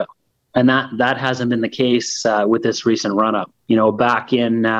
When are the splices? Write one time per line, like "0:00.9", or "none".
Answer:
0:03.6